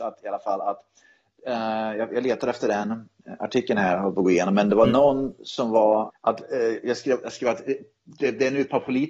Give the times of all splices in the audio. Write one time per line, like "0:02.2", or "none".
0:06.1